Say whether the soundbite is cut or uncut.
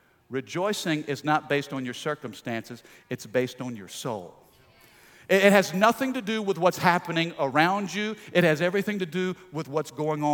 uncut